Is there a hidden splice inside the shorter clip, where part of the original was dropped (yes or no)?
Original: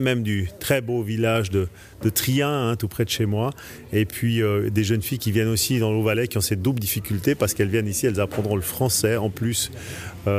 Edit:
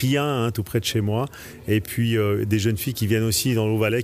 no